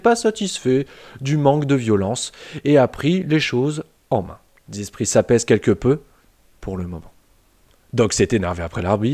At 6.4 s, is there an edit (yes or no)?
no